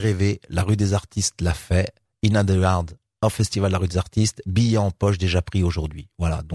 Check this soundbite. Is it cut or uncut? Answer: uncut